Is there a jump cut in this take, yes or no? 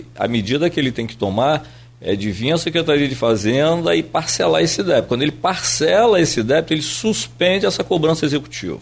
no